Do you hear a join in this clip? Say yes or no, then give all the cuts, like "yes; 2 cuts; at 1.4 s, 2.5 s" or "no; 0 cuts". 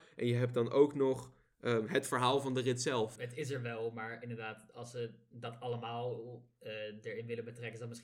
yes; 1 cut; at 3.2 s